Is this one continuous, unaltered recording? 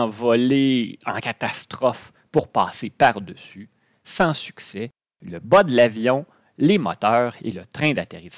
yes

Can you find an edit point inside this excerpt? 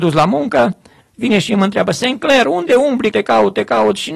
yes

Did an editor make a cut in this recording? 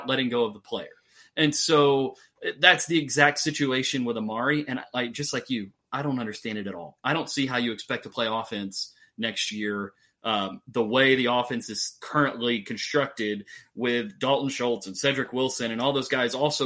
no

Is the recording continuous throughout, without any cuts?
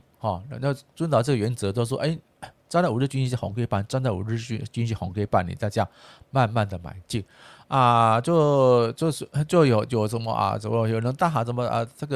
yes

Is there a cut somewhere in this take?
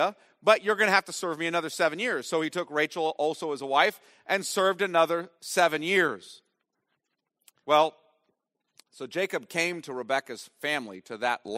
yes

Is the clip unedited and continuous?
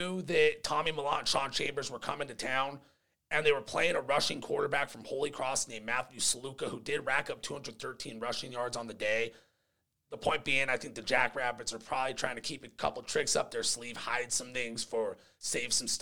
yes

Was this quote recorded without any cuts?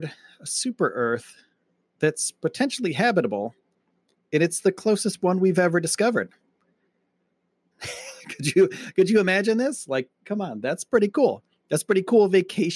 no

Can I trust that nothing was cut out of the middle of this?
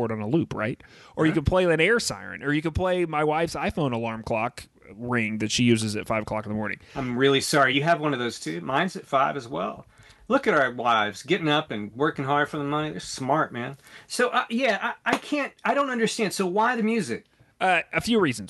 yes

